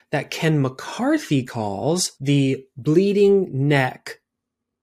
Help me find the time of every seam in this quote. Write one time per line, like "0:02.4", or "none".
0:02.1

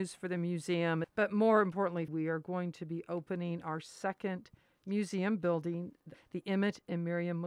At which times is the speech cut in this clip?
0:01.0
0:02.1
0:06.1

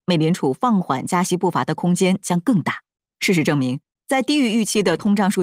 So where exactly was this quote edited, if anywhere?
none

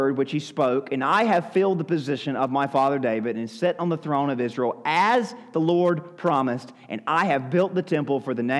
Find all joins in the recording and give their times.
none

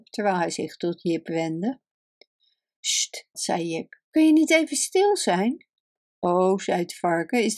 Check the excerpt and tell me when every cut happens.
0:03.3

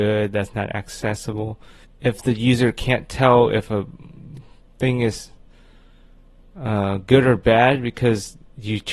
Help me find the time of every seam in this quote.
0:01.8

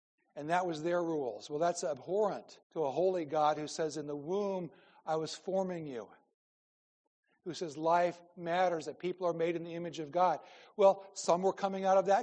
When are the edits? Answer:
0:02.6

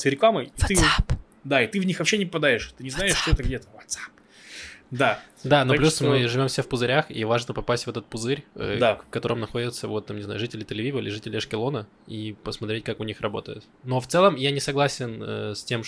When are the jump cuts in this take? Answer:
none

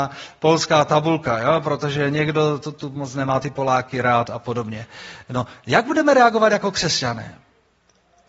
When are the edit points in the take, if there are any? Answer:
none

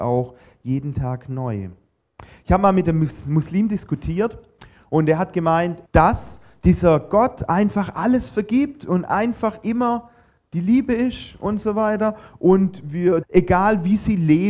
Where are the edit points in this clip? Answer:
0:05.9
0:13.2

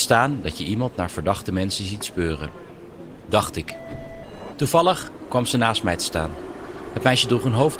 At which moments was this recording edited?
0:04.5

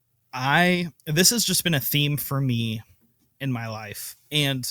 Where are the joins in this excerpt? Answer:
0:01.0

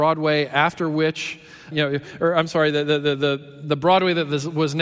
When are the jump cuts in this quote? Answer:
0:01.7

